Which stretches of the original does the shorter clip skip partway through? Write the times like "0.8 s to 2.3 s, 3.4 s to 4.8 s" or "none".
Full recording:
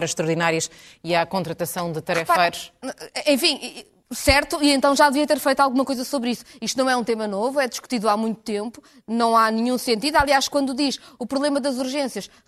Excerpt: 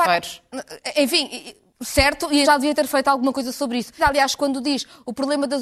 4.7 s to 5.0 s, 6.5 s to 10.1 s